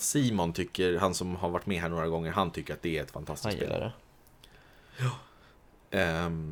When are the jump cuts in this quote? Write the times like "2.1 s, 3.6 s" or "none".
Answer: none